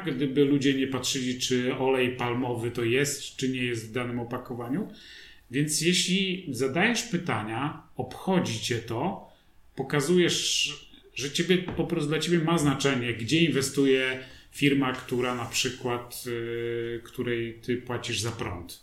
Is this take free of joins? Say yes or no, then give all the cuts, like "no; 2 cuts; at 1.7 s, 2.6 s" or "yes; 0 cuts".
yes; 0 cuts